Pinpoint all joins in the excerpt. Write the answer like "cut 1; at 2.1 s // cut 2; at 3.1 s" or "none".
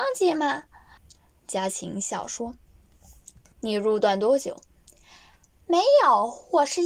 cut 1; at 1.0 s